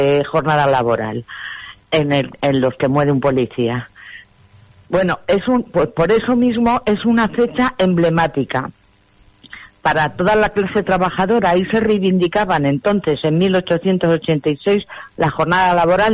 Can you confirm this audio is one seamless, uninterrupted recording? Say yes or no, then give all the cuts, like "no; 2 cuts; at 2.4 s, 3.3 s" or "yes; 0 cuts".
no; 1 cut; at 1.8 s